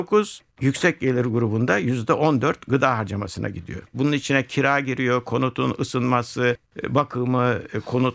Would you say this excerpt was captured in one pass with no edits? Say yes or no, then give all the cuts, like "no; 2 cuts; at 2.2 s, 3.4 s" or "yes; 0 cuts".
no; 1 cut; at 3.9 s